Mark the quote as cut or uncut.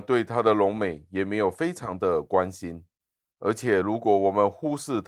uncut